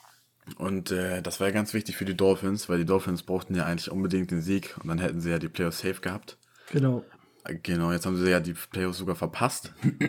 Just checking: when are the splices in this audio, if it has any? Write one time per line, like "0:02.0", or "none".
none